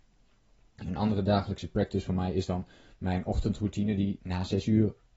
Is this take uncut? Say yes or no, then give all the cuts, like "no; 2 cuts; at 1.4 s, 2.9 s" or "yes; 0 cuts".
yes; 0 cuts